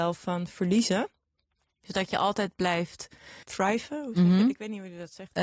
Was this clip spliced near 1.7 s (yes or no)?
no